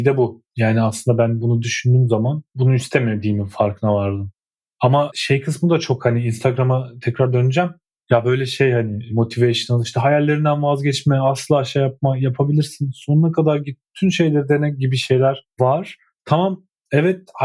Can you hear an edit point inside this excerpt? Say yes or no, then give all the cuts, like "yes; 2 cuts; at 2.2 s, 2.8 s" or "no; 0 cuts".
no; 0 cuts